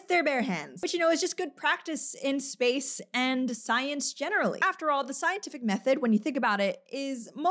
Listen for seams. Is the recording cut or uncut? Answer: uncut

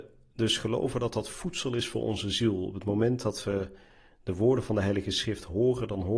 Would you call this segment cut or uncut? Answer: uncut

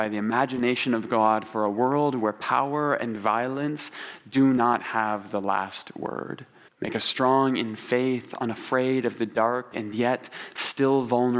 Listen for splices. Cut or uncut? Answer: cut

